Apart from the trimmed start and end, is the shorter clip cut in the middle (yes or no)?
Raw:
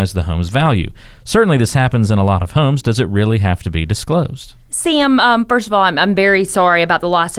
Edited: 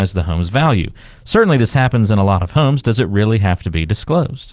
no